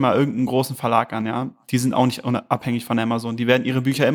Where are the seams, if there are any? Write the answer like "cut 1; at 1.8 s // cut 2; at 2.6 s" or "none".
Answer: none

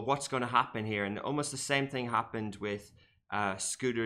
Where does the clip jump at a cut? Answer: none

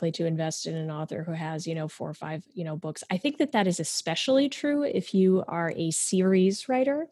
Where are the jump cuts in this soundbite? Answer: none

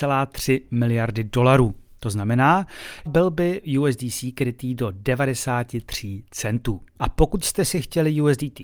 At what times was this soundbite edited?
cut 1; at 3.1 s // cut 2; at 6.9 s

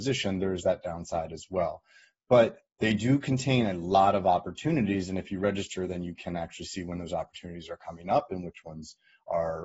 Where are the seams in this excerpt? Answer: none

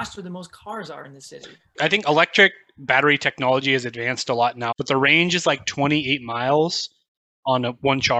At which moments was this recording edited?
cut 1; at 1.7 s // cut 2; at 4.7 s

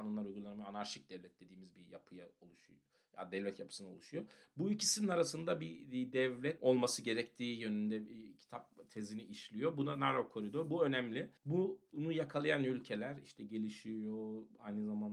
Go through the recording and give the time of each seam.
cut 1; at 11.4 s

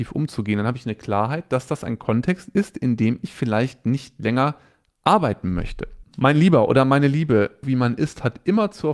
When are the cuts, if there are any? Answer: cut 1; at 6.0 s // cut 2; at 7.6 s

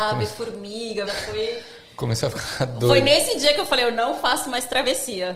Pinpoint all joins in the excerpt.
cut 1; at 1.1 s

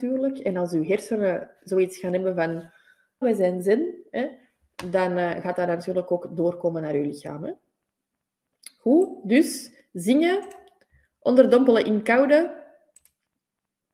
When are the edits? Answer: cut 1; at 3.2 s

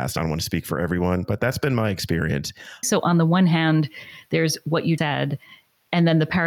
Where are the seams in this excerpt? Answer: cut 1; at 2.8 s // cut 2; at 5.0 s

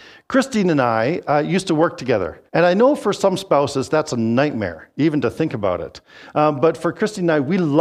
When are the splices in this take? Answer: cut 1; at 2.5 s

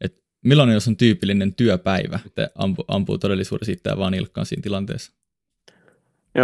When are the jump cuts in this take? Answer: cut 1; at 2.2 s

